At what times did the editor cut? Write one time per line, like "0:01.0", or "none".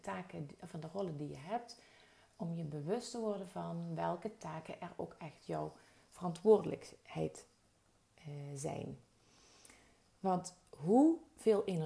none